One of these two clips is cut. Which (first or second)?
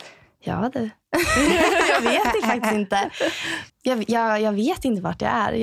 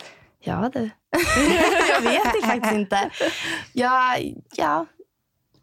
first